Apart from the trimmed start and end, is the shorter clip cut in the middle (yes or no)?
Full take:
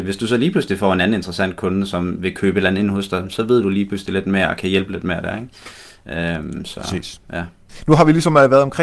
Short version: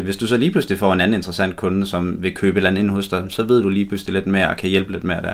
no